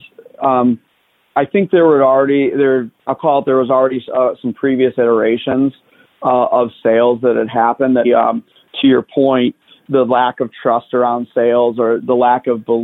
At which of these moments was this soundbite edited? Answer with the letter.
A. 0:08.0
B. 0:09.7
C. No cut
A